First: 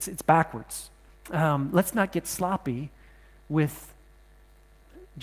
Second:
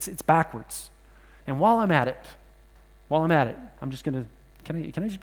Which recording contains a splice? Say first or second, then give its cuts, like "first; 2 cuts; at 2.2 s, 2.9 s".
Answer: first; 1 cut; at 1.1 s